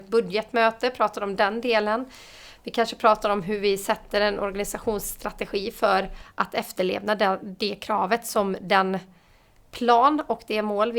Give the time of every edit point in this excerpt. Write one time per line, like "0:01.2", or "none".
none